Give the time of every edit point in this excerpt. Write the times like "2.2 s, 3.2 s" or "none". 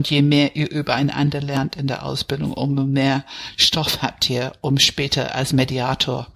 none